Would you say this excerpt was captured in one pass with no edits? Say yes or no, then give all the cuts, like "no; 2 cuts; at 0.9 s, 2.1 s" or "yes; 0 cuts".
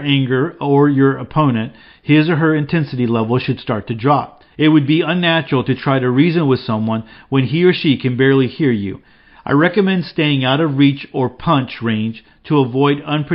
no; 1 cut; at 4.5 s